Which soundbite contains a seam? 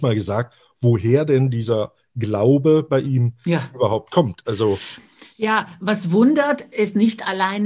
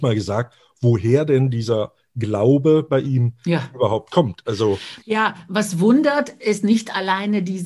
second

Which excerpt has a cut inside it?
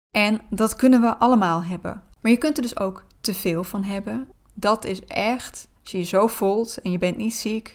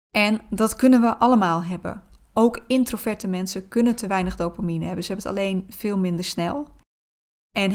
first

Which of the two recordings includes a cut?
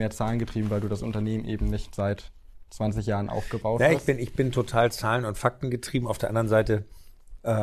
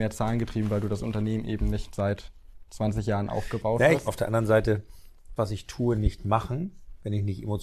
second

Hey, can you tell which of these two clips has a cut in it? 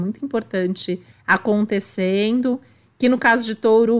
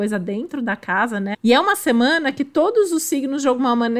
second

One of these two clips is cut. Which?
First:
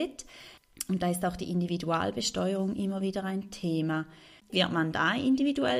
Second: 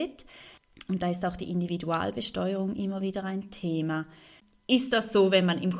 first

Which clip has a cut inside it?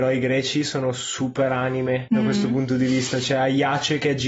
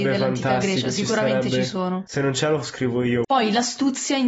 second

